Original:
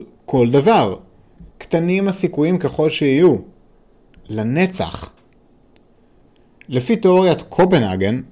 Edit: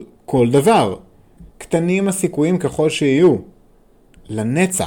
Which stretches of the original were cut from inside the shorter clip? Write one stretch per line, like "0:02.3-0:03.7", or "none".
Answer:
none